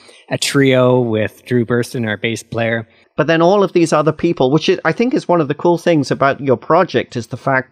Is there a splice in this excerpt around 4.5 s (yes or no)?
no